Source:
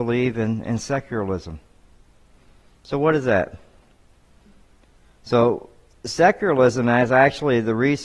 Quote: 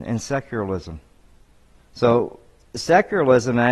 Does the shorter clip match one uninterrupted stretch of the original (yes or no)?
no